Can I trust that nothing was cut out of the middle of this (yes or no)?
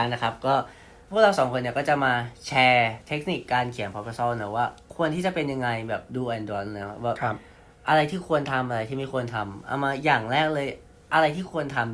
yes